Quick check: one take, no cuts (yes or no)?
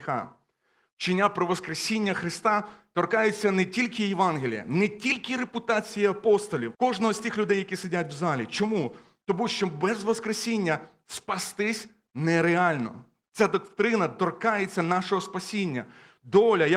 no